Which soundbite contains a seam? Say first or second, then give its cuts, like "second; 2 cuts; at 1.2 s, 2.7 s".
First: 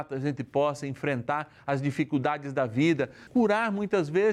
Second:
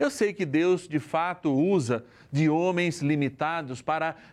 first; 1 cut; at 3.3 s